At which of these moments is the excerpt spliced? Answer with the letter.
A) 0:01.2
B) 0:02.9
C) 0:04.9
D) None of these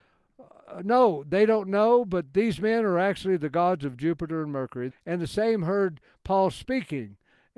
C